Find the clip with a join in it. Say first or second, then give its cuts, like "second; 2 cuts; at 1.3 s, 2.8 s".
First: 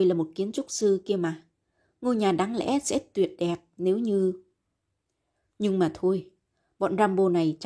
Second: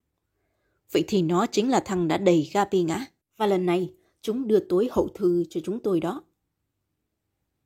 second; 1 cut; at 3.2 s